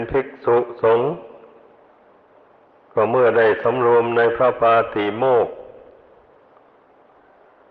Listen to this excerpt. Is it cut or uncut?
uncut